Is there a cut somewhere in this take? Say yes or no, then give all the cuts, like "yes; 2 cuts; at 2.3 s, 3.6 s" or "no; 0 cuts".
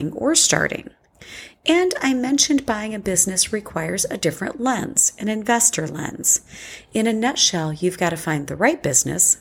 no; 0 cuts